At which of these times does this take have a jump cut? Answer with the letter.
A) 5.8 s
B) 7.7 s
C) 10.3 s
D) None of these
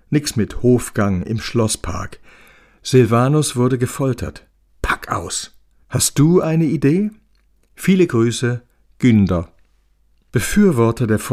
A